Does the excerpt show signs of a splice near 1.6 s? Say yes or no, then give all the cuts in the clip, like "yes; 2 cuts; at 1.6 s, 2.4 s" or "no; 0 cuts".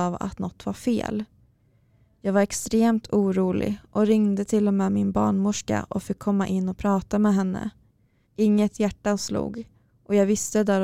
no; 1 cut; at 8.2 s